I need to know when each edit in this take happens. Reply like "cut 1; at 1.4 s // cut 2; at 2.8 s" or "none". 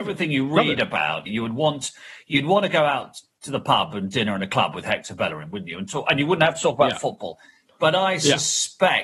cut 1; at 1.3 s